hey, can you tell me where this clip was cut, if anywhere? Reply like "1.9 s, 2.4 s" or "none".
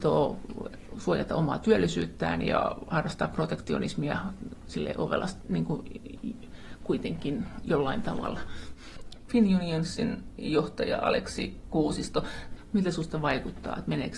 9.3 s